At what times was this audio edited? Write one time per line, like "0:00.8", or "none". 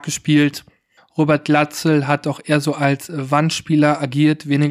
0:01.0